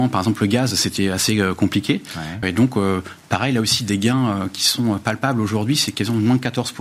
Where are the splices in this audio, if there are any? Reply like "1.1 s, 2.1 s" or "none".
2.4 s

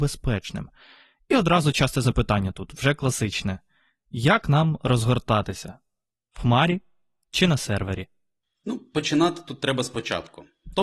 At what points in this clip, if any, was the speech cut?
none

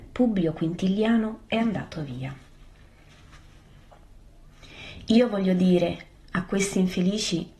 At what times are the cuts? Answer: 1.5 s

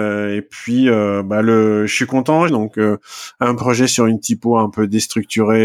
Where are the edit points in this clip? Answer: 2.5 s

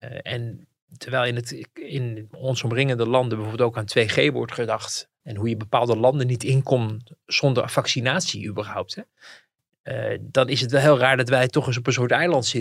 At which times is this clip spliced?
5.2 s

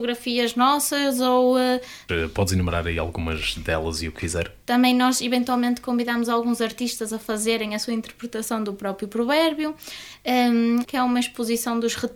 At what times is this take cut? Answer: 2.1 s, 4.6 s, 10.8 s

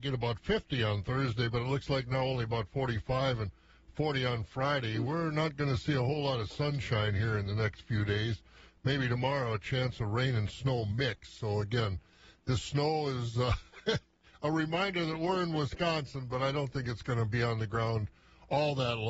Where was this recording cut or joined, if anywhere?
none

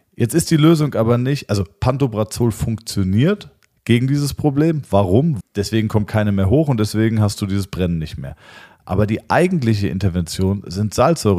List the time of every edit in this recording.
5.4 s

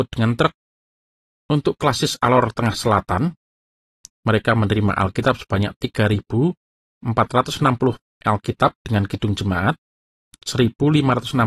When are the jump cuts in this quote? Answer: 1.3 s, 4.1 s

